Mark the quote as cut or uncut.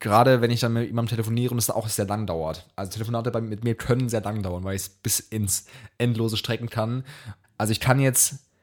cut